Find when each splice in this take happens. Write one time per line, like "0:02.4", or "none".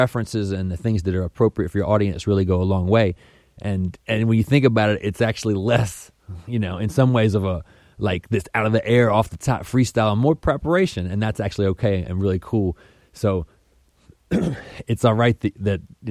none